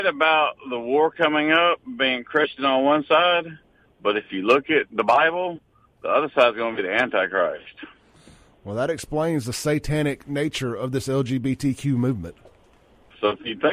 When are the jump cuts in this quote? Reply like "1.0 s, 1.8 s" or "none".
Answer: none